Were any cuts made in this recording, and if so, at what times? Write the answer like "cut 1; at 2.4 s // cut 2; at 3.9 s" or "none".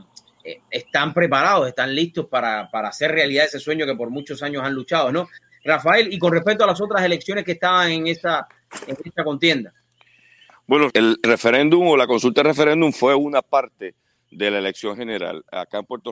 cut 1; at 10.9 s